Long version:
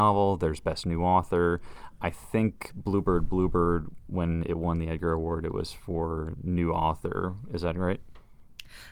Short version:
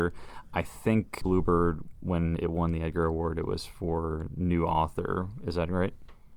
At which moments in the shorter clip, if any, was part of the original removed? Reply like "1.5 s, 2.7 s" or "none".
1.2 s